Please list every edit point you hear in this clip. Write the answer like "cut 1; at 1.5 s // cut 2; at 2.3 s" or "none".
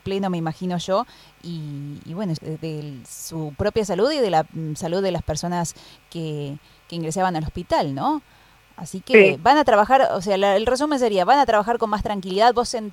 cut 1; at 2.4 s